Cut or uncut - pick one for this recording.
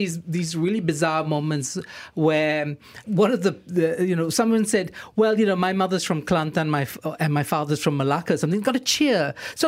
cut